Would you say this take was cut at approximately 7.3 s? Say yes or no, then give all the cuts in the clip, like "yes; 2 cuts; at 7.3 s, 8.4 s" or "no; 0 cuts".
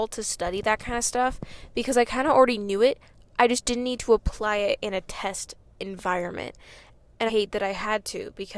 yes; 1 cut; at 7.3 s